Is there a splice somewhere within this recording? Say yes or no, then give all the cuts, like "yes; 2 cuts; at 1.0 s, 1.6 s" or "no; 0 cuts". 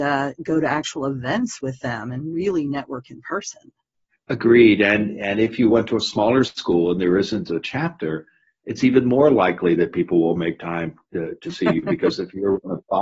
no; 0 cuts